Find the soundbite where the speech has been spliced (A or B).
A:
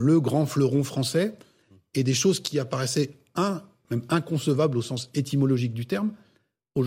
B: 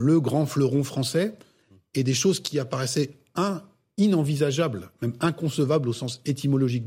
A